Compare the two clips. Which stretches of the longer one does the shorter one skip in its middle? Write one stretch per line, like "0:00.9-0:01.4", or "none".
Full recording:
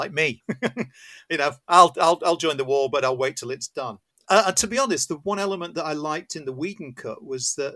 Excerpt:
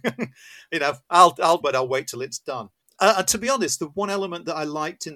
0:02.2-0:02.9